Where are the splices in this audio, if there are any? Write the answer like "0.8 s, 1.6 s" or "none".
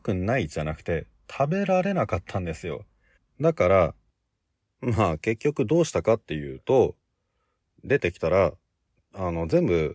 3.2 s, 7.7 s

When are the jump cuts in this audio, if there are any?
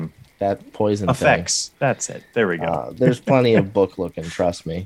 none

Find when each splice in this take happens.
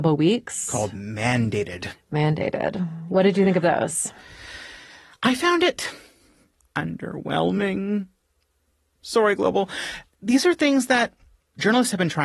none

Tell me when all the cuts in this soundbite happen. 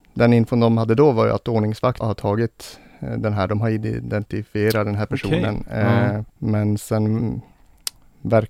2.0 s, 6.3 s

